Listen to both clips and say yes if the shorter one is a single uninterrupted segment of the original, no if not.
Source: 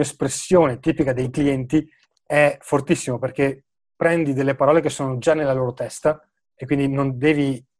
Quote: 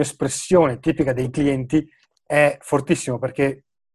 yes